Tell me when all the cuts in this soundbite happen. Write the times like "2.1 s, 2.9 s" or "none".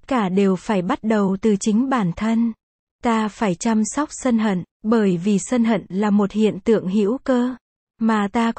2.8 s, 4.7 s